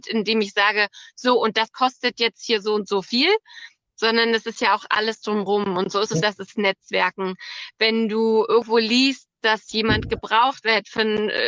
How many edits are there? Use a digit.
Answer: 1